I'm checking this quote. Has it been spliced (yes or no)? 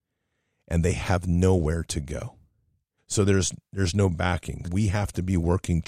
yes